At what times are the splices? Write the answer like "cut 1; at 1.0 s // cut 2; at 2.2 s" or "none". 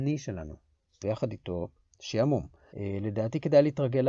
cut 1; at 1.0 s // cut 2; at 2.7 s